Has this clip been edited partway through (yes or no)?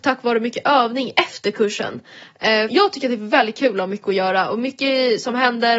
yes